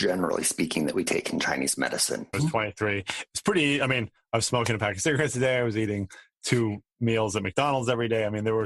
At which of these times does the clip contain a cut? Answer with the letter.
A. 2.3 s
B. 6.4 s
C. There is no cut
A